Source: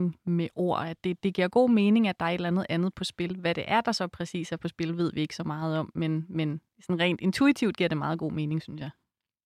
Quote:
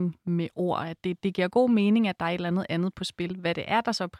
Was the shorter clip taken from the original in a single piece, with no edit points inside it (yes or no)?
yes